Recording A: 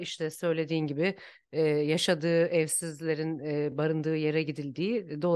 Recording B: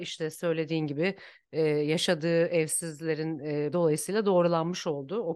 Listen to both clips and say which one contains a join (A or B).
B